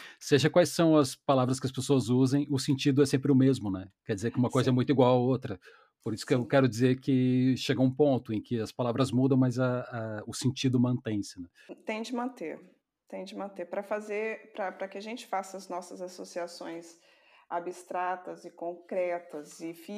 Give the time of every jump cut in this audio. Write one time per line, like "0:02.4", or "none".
none